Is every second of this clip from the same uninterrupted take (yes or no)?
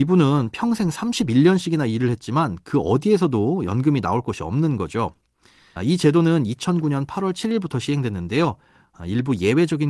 no